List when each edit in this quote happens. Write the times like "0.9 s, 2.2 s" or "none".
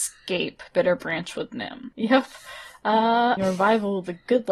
1.9 s, 3.4 s